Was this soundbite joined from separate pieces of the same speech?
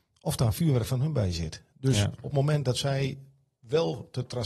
no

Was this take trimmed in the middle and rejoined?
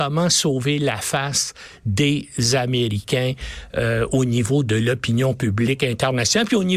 no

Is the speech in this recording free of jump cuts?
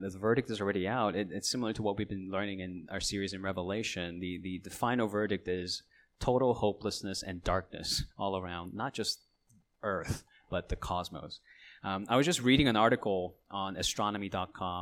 yes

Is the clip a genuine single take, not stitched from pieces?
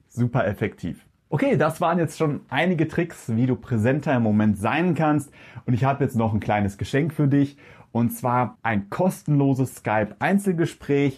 yes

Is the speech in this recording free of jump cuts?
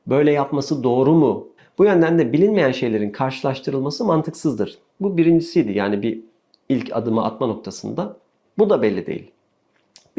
no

